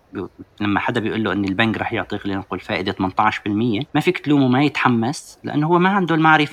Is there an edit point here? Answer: yes; 1 cut; at 3.9 s

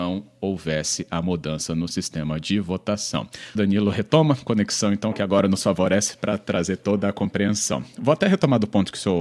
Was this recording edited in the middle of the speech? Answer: yes; 1 cut; at 3.5 s

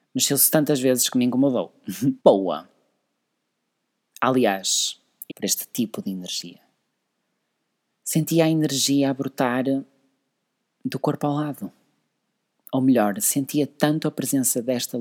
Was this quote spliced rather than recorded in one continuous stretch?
yes; 3 cuts; at 2.2 s, 5.3 s, 7.9 s

